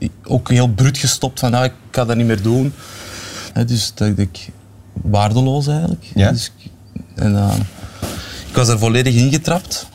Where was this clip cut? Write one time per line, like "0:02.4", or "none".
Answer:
0:03.5